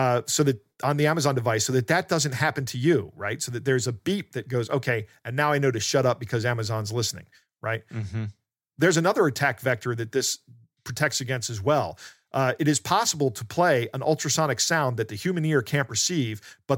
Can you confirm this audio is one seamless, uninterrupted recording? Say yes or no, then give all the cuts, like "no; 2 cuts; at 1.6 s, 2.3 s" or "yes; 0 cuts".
yes; 0 cuts